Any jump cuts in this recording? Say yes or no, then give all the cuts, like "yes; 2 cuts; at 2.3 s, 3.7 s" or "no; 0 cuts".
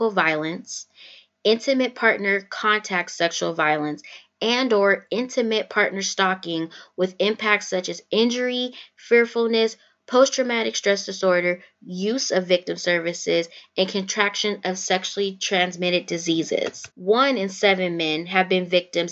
yes; 1 cut; at 16.9 s